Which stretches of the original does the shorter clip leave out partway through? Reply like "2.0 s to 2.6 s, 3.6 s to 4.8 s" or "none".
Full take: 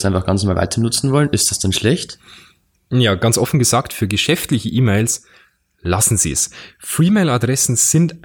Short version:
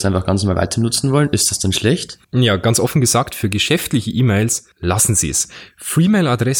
2.2 s to 2.8 s, 5.3 s to 5.7 s